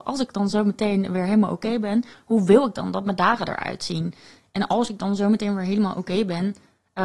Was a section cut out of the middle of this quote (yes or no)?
no